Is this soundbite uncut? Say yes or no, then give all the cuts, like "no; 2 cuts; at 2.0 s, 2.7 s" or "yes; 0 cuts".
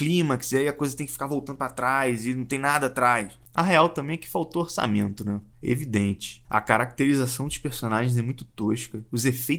yes; 0 cuts